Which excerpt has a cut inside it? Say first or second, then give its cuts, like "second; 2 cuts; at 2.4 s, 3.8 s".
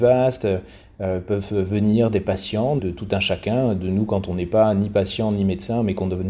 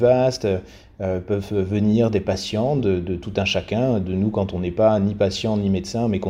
first; 1 cut; at 2.8 s